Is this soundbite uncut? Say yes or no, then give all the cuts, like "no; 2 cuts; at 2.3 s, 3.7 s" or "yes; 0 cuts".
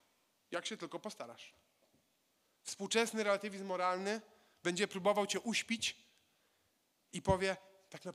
yes; 0 cuts